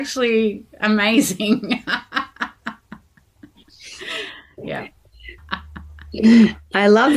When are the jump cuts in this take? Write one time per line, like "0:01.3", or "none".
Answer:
0:05.4